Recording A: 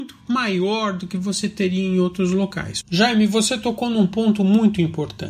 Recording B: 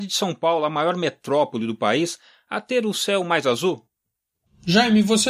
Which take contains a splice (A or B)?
A